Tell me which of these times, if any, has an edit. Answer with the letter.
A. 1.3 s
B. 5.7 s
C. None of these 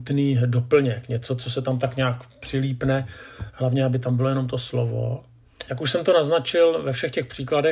B